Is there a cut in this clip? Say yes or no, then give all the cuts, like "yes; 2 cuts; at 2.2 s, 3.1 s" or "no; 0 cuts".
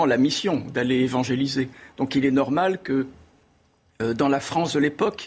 no; 0 cuts